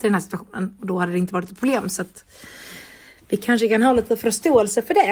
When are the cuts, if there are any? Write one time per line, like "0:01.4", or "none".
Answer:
none

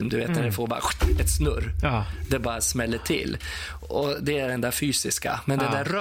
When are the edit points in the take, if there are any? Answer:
none

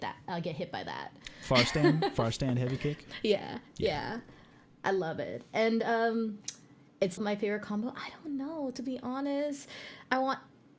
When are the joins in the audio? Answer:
0:07.2

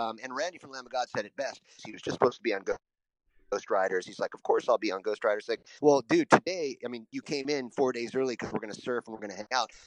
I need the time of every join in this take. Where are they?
0:01.8

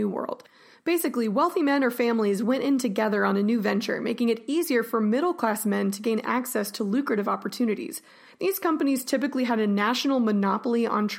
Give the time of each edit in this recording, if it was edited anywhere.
0:08.3

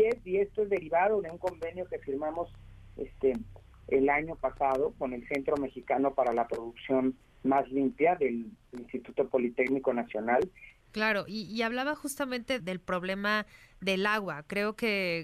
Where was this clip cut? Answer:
0:10.8
0:12.6

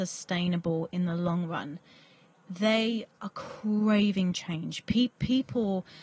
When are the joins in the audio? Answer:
none

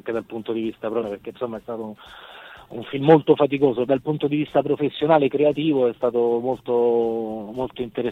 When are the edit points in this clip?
0:01.0
0:03.9

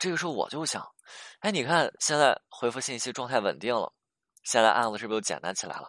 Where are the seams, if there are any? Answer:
none

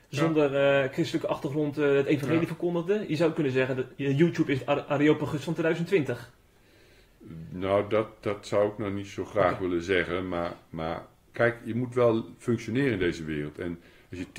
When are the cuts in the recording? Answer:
none

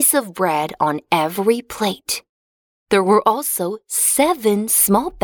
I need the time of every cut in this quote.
none

